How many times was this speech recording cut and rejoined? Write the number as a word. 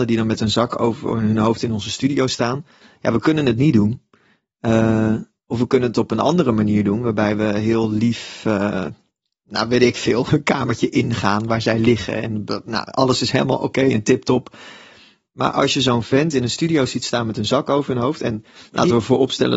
zero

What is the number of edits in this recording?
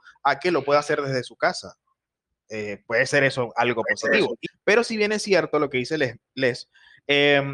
one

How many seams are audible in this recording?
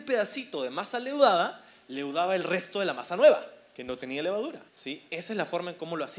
one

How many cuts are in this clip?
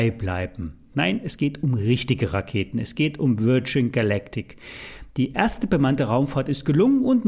one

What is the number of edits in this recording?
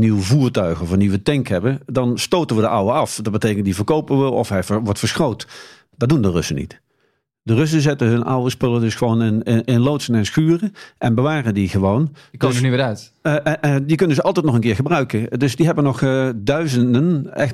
zero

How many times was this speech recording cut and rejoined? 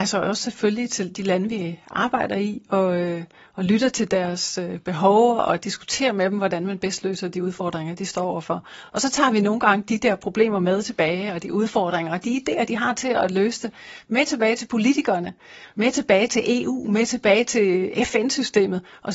zero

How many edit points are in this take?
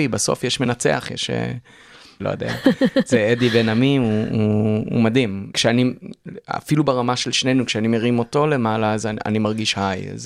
three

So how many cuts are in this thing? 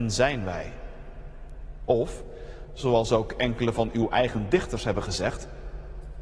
zero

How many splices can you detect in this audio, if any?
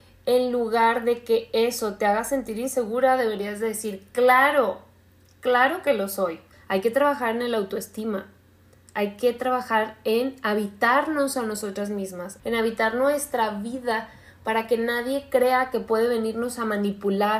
two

